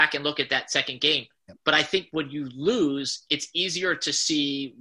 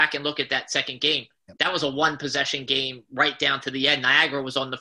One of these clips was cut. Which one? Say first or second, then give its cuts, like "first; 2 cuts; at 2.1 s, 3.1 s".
first; 1 cut; at 1.6 s